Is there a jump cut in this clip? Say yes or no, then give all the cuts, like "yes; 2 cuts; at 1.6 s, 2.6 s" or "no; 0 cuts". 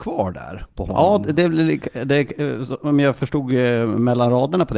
no; 0 cuts